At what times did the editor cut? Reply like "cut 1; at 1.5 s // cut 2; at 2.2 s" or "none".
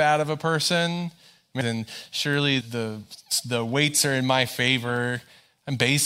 cut 1; at 1.6 s // cut 2; at 2.6 s